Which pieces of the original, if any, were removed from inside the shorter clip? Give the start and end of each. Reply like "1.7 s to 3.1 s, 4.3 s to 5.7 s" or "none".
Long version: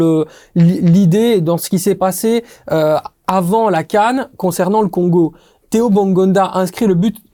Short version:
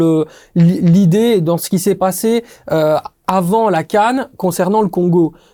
none